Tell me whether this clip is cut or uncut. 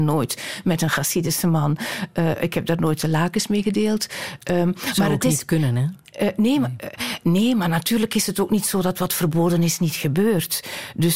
uncut